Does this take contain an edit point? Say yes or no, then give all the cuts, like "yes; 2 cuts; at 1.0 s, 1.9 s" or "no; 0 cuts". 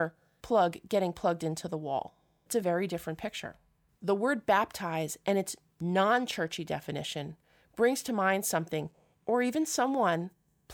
no; 0 cuts